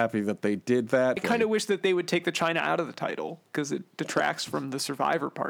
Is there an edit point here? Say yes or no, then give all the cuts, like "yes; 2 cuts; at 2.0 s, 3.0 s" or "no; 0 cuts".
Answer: yes; 1 cut; at 1.2 s